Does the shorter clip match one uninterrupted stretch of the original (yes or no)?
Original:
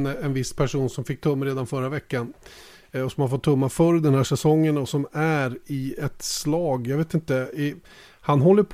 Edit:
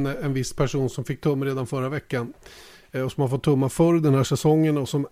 yes